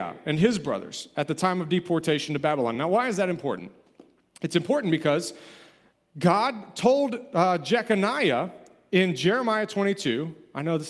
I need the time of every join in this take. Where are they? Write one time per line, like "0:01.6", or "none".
none